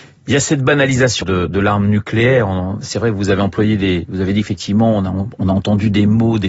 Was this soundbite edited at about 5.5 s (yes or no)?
no